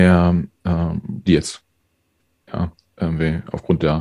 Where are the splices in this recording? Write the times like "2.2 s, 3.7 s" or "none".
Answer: 1.3 s